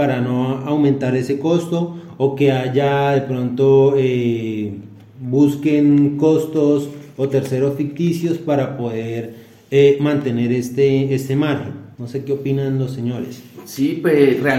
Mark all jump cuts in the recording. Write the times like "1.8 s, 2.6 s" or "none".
11.9 s